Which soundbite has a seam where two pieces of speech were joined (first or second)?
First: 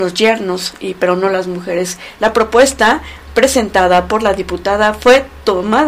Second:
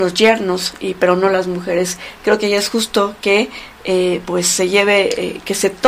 first